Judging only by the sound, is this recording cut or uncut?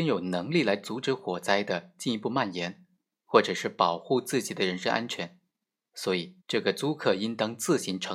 cut